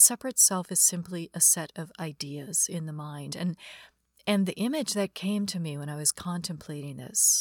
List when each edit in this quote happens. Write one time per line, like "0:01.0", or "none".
none